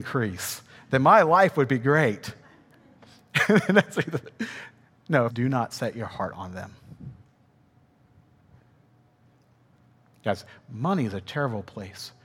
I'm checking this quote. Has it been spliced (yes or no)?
yes